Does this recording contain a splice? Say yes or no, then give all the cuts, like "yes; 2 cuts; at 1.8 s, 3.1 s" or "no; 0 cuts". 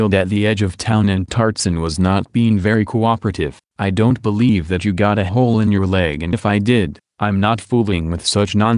yes; 2 cuts; at 3.6 s, 6.3 s